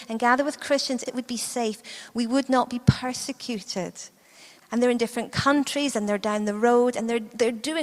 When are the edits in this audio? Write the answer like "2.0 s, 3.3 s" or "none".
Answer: 1.1 s, 4.6 s